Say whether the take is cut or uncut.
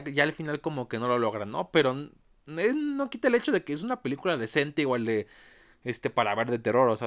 uncut